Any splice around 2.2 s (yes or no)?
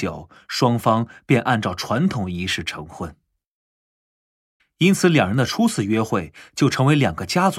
no